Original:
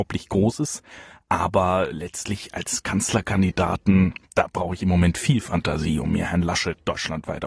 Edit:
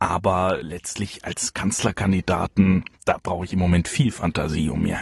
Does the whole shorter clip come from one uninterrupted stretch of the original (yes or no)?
yes